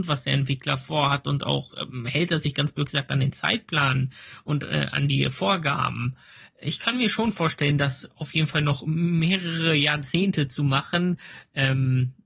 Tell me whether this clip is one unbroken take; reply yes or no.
yes